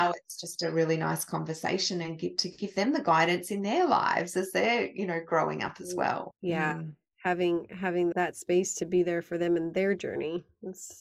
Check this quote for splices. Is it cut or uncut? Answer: cut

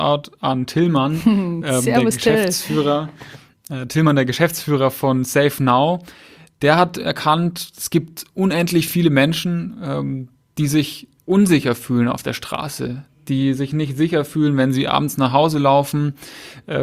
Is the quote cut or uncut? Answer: uncut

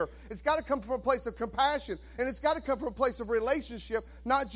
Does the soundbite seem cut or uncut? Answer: uncut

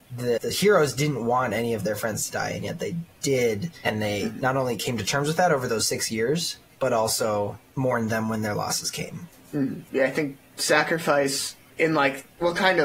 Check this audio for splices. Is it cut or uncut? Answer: uncut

